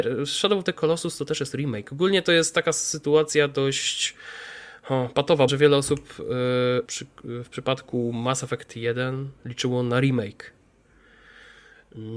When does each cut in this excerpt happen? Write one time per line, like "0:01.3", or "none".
0:05.5
0:06.8